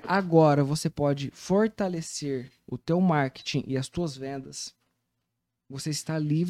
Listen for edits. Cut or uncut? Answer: uncut